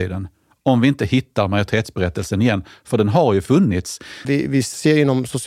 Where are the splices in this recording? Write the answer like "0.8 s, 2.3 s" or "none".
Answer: 4.2 s